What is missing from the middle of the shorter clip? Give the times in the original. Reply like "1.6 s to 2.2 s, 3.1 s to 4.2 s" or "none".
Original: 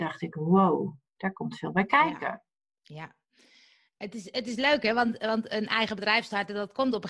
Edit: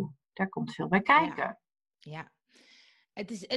none